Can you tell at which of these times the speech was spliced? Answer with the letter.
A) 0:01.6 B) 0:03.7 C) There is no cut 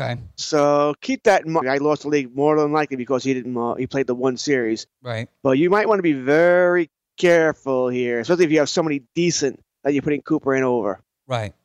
A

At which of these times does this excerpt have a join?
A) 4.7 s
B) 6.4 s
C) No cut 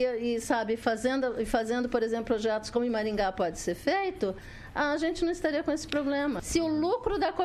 B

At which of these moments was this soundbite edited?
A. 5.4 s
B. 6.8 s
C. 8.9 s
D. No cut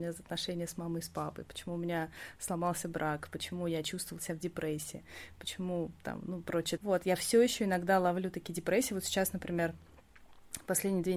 B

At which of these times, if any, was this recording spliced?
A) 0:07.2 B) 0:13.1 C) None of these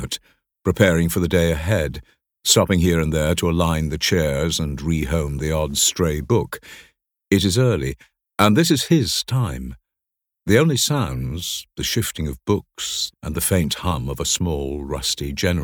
B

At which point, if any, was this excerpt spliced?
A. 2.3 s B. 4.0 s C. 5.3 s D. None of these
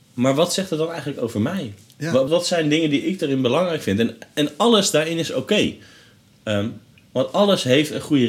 A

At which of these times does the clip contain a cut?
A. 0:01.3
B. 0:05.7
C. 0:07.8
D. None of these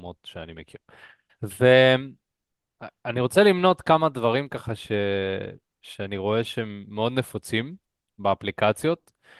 A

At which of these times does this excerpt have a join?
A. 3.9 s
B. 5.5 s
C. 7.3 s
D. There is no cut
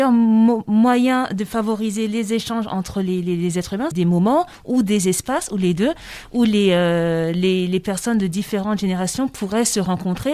A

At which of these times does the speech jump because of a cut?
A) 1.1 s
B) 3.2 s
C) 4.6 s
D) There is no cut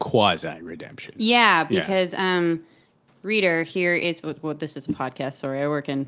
D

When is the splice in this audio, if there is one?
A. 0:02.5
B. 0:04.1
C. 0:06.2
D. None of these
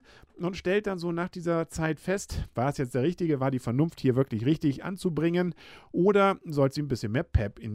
A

